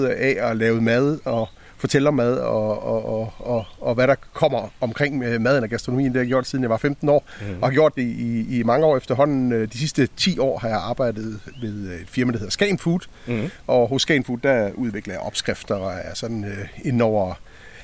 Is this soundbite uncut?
yes; 0 cuts

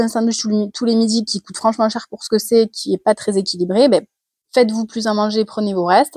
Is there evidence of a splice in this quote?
no; 0 cuts

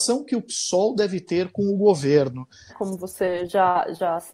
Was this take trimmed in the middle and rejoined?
yes; 1 cut; at 2.7 s

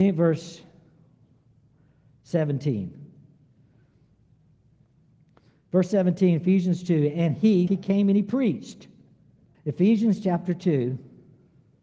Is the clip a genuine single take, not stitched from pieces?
no; 2 cuts; at 7.7 s, 9.5 s

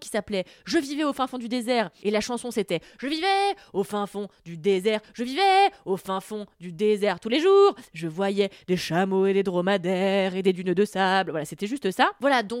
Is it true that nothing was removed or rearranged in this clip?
yes; 0 cuts

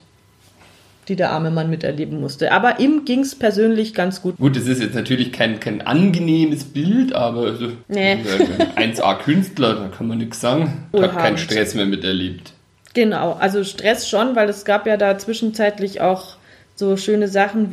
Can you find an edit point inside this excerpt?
yes; 3 cuts; at 4.4 s, 7.8 s, 10.9 s

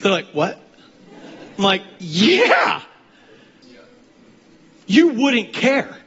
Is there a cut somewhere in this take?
yes; 1 cut; at 3.6 s

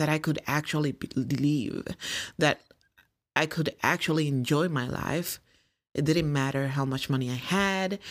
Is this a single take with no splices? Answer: yes; 0 cuts

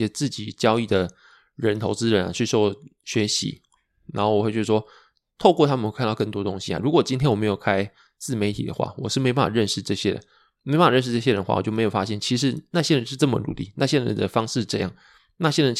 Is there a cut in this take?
no; 0 cuts

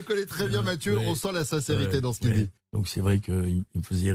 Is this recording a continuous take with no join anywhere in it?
no; 1 cut; at 2.6 s

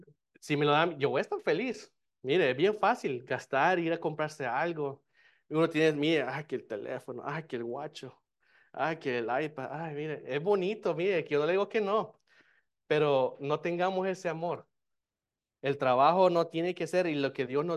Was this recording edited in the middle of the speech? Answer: no; 0 cuts

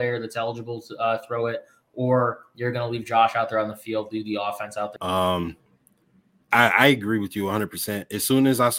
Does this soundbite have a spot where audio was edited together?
yes; 1 cut; at 5.0 s

